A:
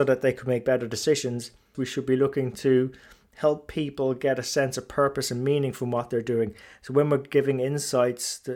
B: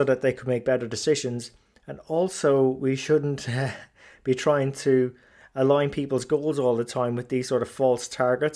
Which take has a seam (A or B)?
A